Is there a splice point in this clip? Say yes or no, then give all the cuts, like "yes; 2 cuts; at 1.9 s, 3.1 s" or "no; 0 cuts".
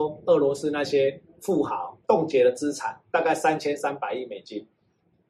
yes; 1 cut; at 2.0 s